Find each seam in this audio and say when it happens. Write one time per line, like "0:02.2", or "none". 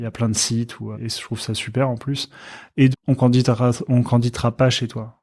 0:00.9
0:02.9

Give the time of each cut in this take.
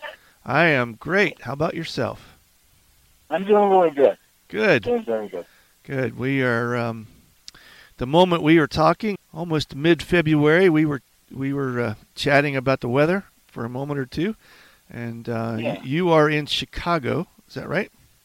0:09.2

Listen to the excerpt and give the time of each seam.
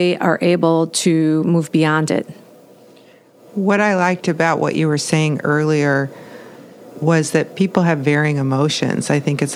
none

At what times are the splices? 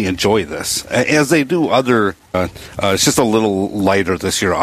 0:02.3

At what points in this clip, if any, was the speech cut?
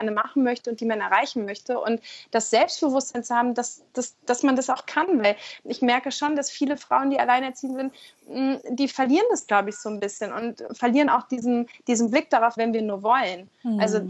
0:12.6

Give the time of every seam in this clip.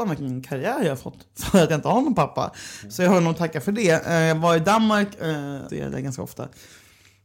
0:05.7

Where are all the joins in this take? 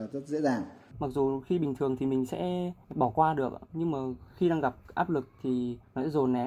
0:00.9

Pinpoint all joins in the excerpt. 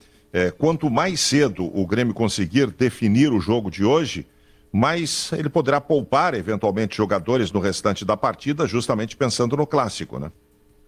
none

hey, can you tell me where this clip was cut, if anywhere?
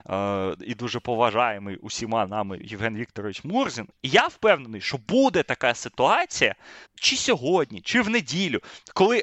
0:04.0
0:06.8

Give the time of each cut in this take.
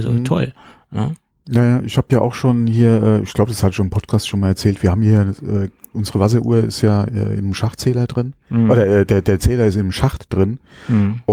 none

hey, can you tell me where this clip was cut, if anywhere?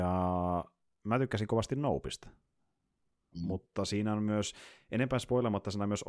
0:03.3

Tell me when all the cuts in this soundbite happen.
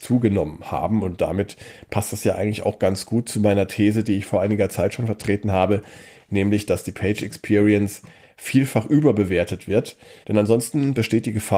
0:10.2

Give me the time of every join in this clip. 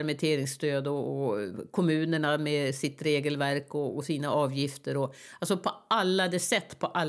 none

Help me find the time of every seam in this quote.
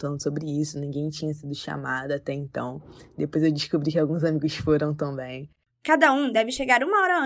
0:05.7

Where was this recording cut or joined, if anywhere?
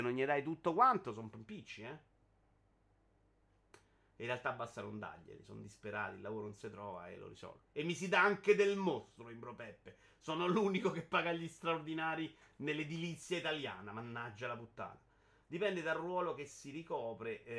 0:07.6

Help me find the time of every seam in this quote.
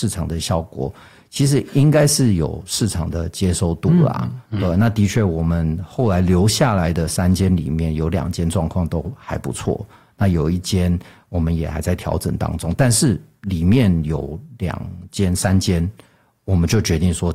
none

